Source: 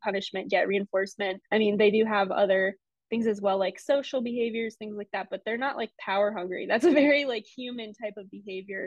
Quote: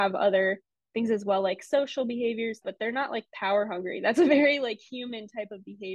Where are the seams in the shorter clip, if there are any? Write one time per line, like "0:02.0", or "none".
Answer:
0:02.6